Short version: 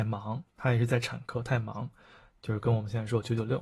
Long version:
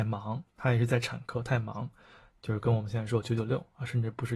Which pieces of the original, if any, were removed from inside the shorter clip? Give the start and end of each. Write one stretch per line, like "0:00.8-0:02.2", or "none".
none